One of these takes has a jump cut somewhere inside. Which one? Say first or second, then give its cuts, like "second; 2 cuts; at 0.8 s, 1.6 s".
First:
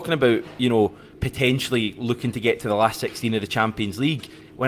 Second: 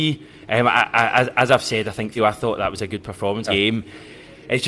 second; 2 cuts; at 2.2 s, 3.5 s